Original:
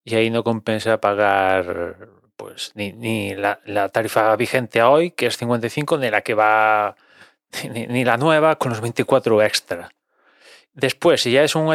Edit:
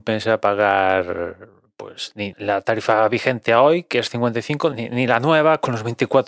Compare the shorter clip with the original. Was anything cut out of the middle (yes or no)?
yes